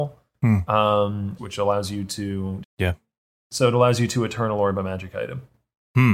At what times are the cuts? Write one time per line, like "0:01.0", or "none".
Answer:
0:01.4
0:02.6

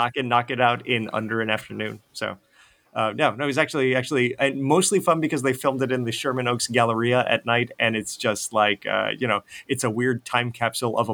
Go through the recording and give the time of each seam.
none

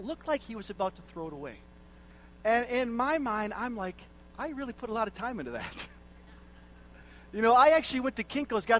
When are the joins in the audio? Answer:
none

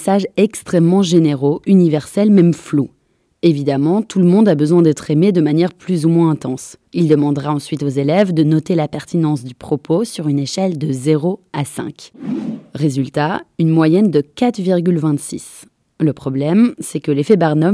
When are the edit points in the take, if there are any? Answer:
0:06.9

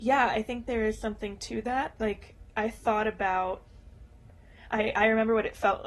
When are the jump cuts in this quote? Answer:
0:02.5

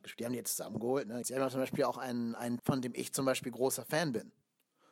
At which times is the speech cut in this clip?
0:01.2
0:02.6

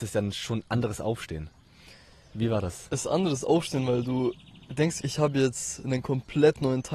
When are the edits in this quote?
0:05.0

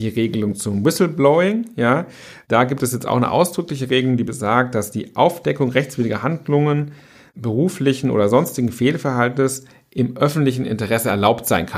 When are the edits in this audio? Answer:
none

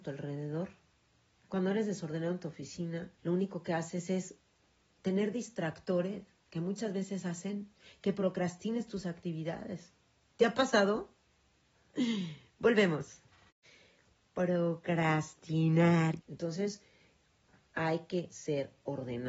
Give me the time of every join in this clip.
0:03.2
0:16.2

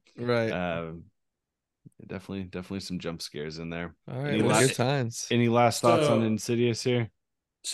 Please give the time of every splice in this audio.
0:04.0

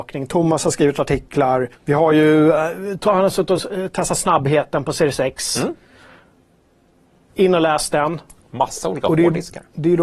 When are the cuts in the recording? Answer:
0:01.8

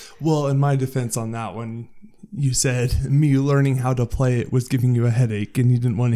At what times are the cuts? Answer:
none

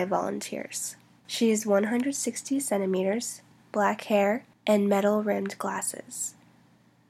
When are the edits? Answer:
0:01.2
0:03.6

